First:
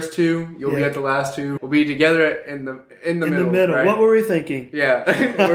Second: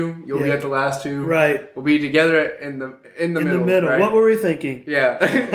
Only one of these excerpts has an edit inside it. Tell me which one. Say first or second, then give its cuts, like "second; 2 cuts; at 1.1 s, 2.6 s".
first; 1 cut; at 1.6 s